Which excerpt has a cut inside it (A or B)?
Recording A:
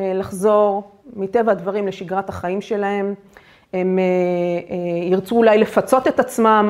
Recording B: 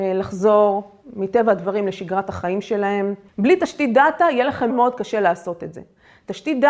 B